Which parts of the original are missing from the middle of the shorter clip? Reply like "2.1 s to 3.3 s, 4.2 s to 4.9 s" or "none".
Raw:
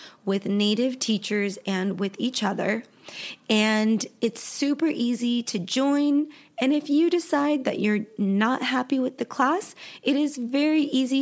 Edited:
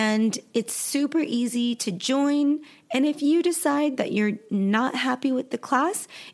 none